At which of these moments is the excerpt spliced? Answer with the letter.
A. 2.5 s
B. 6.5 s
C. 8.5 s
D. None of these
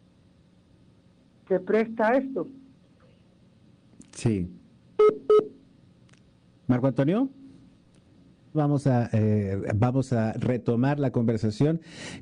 C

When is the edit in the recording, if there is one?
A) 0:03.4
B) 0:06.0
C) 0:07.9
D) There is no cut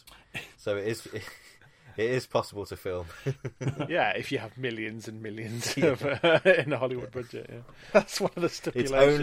C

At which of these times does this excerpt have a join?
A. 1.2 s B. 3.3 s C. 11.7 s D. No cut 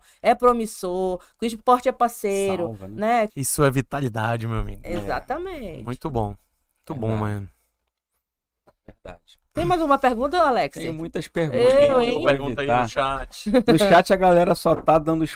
B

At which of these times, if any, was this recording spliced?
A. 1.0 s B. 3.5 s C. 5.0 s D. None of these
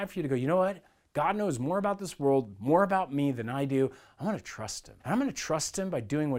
C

